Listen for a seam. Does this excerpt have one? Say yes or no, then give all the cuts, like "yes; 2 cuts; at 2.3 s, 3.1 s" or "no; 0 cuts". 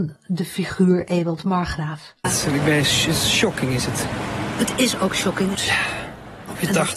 yes; 2 cuts; at 2.2 s, 5.5 s